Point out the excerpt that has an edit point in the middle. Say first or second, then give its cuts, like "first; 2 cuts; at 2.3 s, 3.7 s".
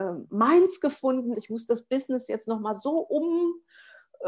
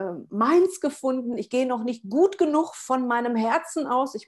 first; 1 cut; at 1.3 s